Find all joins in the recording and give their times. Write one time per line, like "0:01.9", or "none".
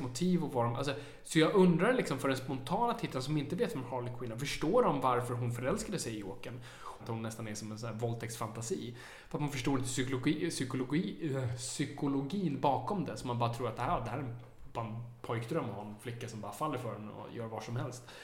0:07.0